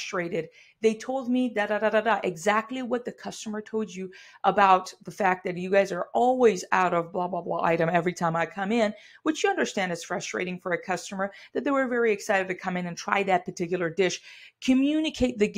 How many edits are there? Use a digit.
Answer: 0